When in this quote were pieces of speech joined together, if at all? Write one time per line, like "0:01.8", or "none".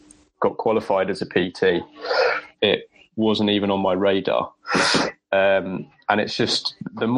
0:02.5

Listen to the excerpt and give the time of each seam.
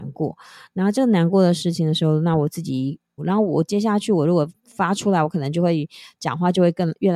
0:03.2

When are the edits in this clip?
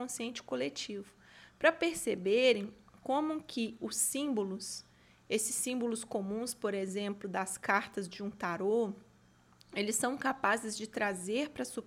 none

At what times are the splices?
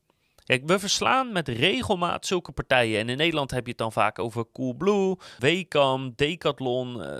0:05.4

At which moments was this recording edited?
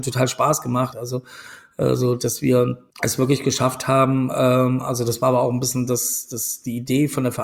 0:00.9
0:02.9

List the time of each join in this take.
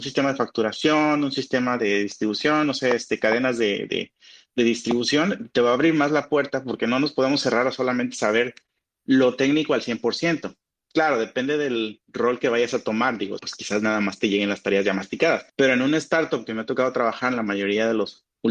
0:13.4
0:15.5

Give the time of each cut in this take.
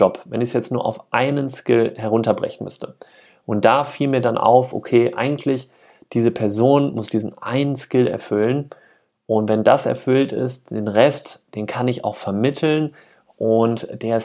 none

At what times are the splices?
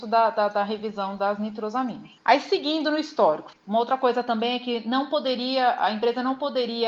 0:02.2
0:03.5

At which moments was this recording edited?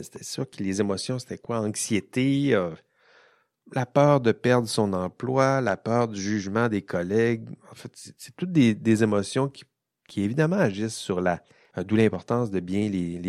0:11.7

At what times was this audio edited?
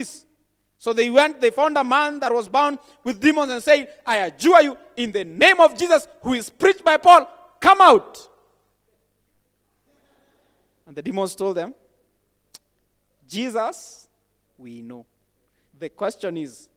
0:15.7

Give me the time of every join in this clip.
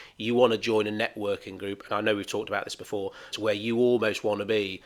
0:03.3

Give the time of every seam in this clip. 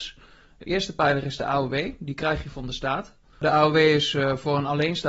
0:03.3

